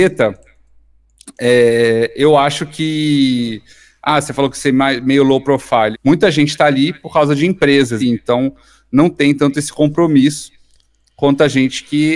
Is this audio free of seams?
no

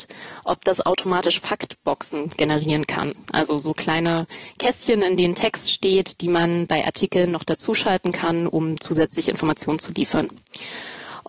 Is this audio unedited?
yes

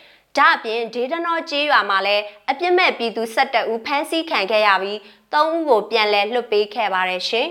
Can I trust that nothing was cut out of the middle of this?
yes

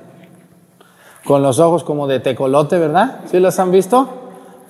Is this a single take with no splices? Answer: yes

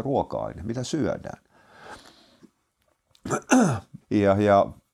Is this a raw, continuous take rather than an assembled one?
no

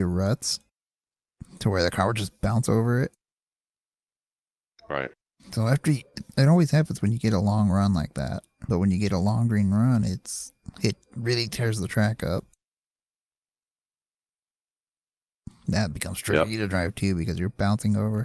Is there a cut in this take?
yes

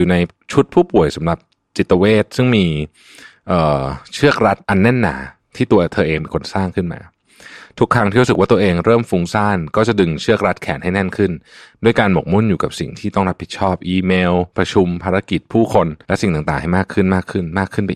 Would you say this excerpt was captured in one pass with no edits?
no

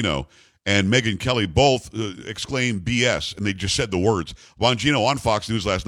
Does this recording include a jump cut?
no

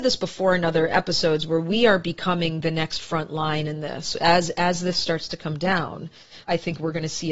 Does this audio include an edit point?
yes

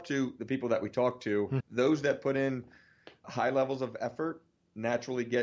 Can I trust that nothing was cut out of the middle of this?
no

